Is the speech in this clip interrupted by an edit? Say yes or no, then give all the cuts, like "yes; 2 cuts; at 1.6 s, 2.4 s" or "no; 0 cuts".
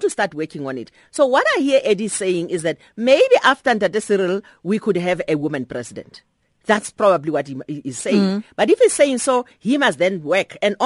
no; 0 cuts